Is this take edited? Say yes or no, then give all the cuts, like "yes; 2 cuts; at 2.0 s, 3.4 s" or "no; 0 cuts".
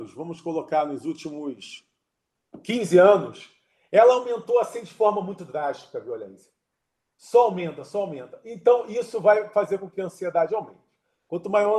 no; 0 cuts